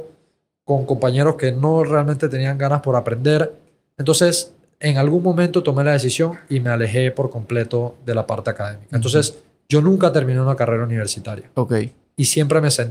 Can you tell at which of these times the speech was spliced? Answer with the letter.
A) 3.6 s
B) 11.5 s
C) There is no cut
C